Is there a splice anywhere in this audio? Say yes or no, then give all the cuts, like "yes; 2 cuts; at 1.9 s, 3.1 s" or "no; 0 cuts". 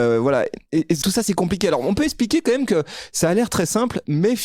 yes; 1 cut; at 1.0 s